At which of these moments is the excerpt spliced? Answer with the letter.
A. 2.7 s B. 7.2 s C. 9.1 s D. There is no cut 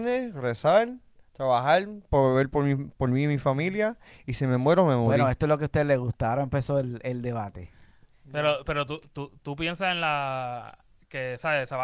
D